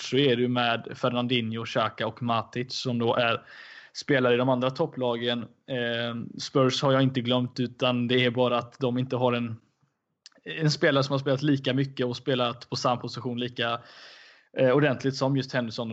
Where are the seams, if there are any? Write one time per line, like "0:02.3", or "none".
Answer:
none